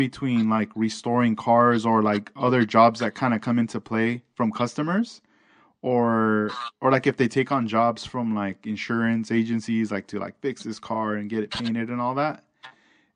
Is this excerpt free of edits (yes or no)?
yes